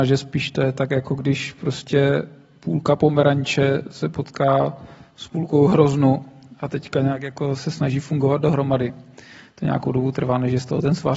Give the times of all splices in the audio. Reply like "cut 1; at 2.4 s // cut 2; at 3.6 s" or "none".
none